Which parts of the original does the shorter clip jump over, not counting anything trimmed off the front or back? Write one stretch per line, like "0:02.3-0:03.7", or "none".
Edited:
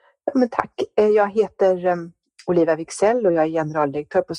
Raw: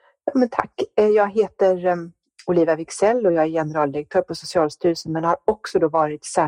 none